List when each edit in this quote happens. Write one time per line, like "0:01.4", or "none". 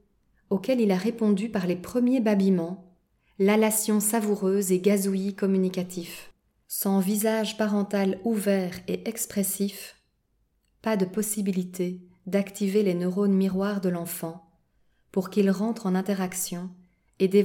0:06.6